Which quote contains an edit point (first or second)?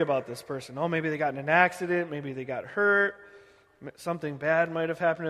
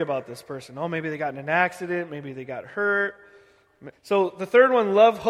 second